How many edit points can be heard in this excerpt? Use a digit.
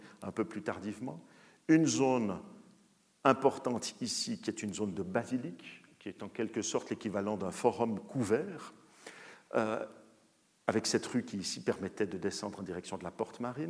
0